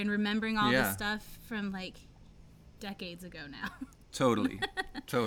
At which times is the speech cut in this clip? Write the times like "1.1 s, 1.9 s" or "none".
none